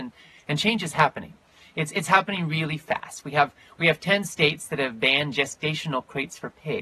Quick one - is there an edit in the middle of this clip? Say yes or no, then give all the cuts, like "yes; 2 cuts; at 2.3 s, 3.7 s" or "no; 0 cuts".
no; 0 cuts